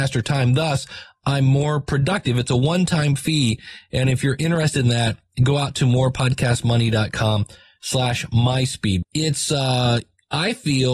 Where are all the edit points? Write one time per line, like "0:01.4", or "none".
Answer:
0:09.0